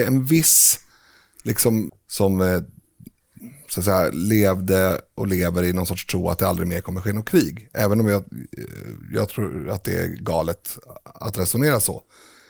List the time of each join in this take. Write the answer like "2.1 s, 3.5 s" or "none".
1.9 s